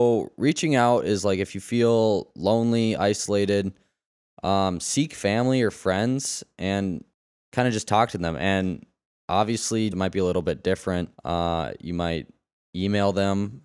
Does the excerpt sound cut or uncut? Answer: cut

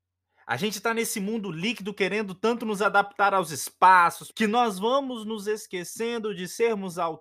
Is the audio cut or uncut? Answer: cut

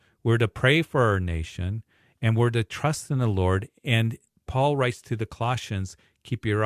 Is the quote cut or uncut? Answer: uncut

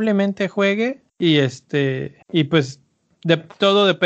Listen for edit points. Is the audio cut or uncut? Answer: cut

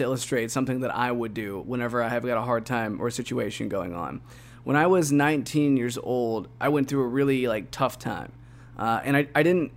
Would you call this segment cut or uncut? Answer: uncut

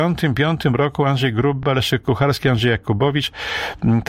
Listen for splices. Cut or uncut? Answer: uncut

